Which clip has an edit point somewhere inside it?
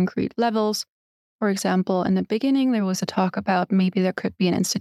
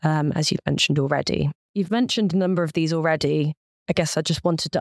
second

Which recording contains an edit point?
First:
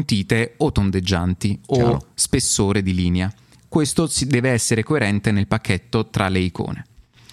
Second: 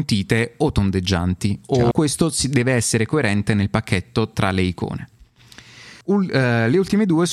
second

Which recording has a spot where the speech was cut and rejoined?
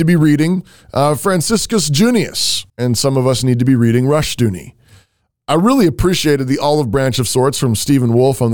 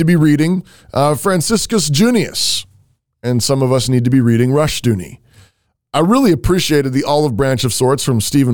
first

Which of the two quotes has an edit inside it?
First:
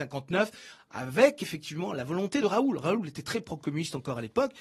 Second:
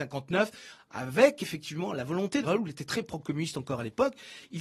second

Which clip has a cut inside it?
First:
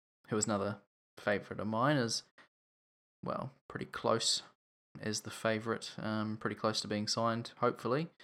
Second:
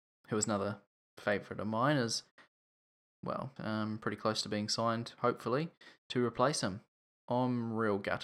second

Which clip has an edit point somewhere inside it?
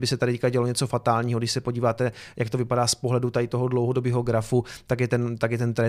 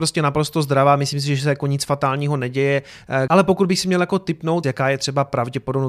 second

